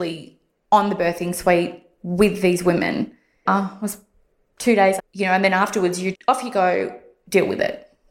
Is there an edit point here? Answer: yes; 3 cuts; at 3.5 s, 5.0 s, 6.1 s

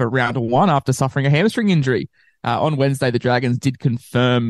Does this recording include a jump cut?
no; 0 cuts

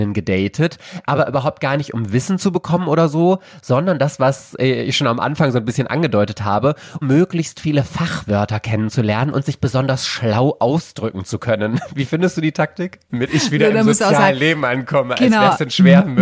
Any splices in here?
yes; 2 cuts; at 7.0 s, 13.1 s

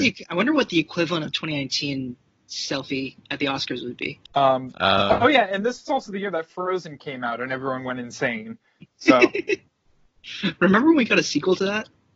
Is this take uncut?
no; 1 cut; at 4.3 s

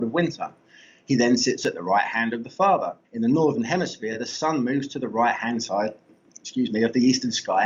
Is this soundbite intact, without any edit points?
no; 1 cut; at 3.0 s

